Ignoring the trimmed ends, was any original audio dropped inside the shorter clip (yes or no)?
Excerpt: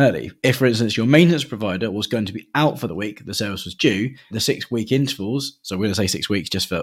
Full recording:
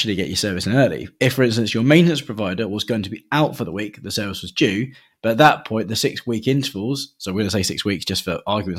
yes